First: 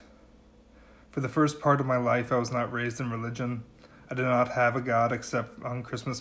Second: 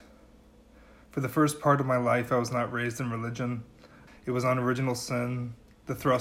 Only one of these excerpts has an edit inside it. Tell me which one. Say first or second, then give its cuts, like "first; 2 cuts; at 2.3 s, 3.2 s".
second; 1 cut; at 4.1 s